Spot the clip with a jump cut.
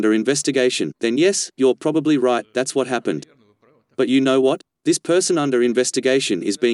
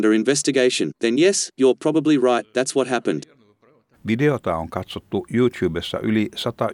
second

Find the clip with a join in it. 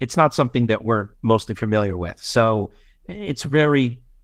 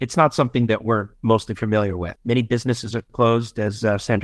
second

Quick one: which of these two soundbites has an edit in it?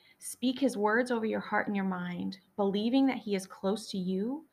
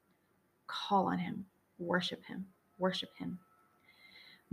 second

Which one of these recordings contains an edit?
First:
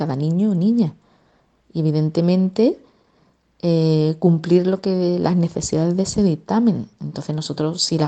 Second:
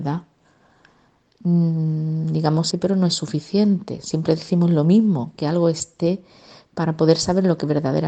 second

